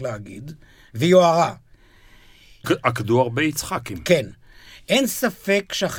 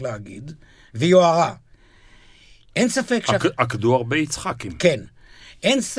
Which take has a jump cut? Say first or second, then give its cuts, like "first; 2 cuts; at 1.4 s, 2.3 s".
first; 1 cut; at 2.6 s